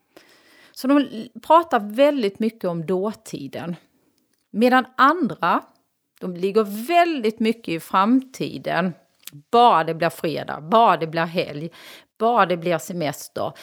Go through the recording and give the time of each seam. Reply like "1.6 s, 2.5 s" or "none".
none